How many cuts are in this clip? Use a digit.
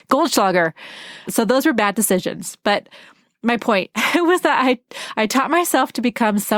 1